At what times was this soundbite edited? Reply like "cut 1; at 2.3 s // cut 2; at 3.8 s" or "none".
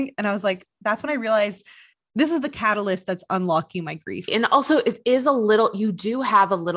cut 1; at 4.3 s